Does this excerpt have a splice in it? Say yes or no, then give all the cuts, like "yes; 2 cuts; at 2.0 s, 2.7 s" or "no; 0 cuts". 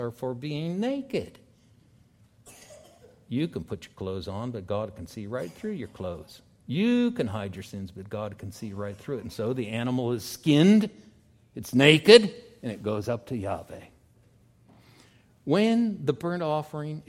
no; 0 cuts